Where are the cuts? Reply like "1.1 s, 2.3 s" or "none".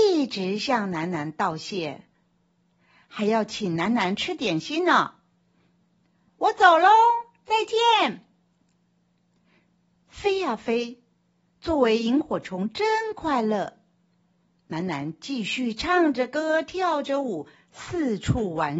6.3 s